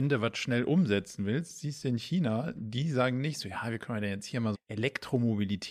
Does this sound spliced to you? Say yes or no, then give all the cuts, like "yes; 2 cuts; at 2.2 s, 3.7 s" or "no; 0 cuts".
yes; 1 cut; at 4.5 s